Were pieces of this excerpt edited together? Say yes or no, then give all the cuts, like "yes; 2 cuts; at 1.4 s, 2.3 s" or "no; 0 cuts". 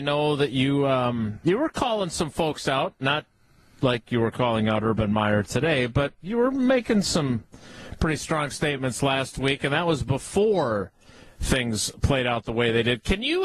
no; 0 cuts